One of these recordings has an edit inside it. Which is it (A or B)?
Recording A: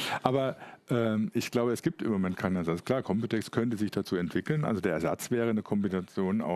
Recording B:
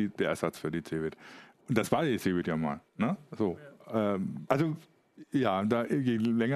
B